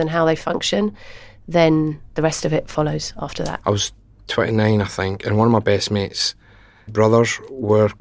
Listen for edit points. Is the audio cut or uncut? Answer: cut